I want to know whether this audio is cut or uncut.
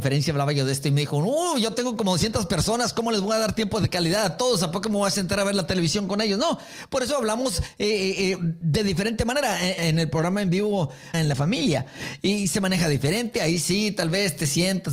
cut